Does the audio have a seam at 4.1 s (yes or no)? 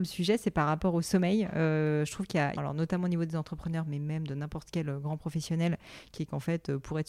no